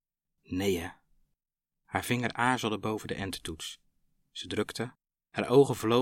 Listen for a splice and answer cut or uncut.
uncut